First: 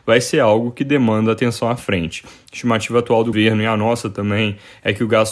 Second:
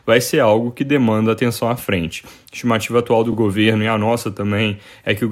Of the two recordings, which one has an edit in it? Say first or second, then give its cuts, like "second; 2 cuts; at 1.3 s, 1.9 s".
first; 1 cut; at 3.3 s